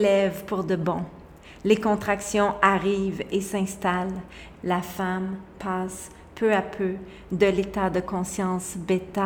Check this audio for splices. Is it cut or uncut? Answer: cut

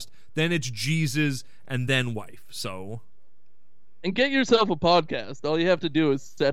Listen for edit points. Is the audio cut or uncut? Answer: uncut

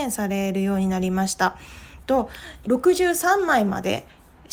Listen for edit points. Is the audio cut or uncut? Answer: cut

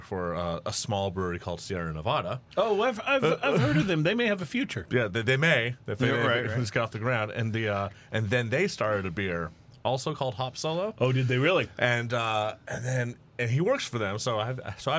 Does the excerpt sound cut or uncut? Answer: uncut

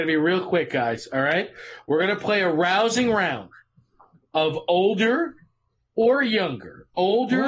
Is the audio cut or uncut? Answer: uncut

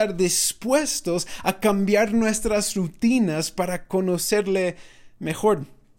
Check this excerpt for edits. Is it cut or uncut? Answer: uncut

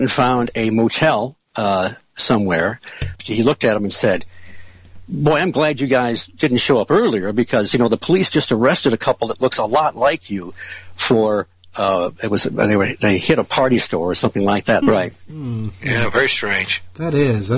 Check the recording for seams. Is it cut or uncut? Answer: cut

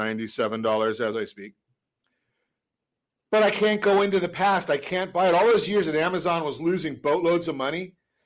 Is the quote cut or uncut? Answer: uncut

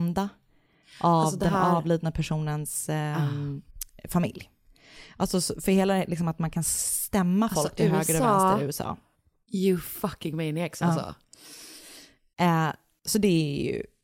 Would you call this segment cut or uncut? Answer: uncut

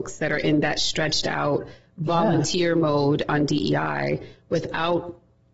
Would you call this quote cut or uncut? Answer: uncut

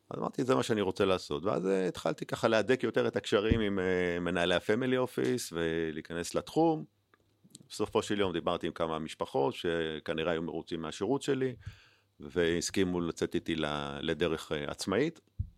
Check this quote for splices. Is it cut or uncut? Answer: uncut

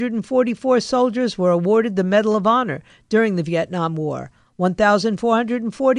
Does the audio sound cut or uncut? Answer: cut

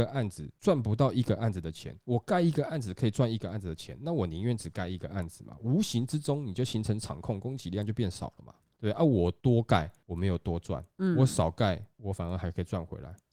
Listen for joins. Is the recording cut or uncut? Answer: cut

